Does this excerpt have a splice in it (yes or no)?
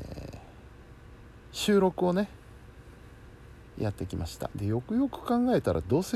yes